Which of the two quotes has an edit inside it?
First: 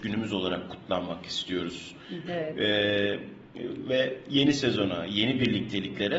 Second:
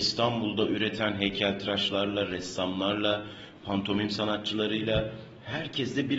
first; 1 cut; at 2.3 s

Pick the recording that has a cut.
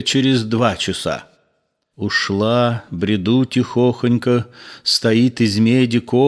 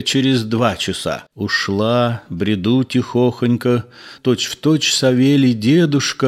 second; 2 cuts; at 1.3 s, 4.2 s

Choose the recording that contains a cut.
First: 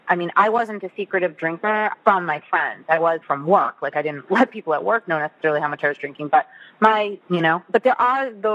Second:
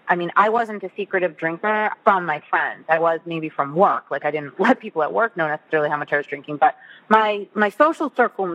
first; 2 cuts; at 3.2 s, 7.2 s

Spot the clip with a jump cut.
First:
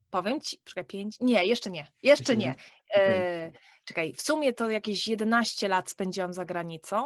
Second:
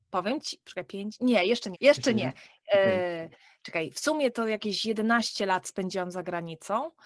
second; 1 cut; at 1.7 s

